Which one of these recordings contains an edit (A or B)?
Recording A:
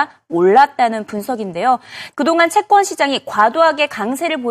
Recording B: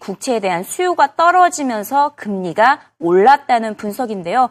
A